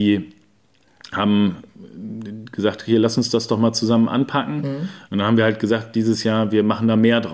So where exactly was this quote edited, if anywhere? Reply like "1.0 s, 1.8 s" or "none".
5.0 s